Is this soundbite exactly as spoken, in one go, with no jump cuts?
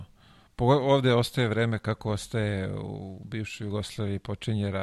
yes; 0 cuts

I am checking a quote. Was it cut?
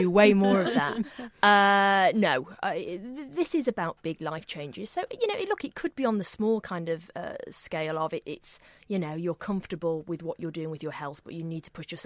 no; 0 cuts

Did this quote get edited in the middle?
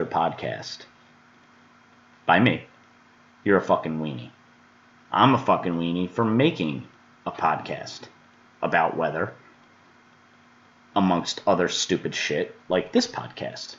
no; 0 cuts

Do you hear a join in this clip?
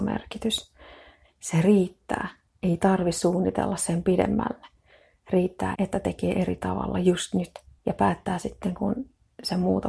yes; 3 cuts; at 1.2 s, 5.7 s, 7.8 s

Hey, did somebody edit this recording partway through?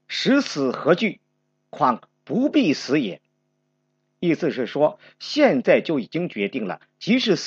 no; 0 cuts

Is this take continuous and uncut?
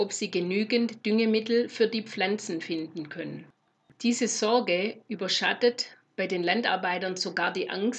yes; 0 cuts

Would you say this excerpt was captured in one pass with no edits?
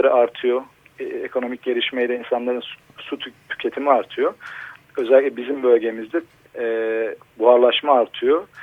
no; 2 cuts; at 4.8 s, 6.5 s

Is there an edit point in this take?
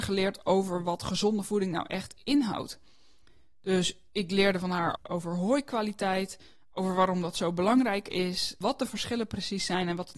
yes; 1 cut; at 5.0 s

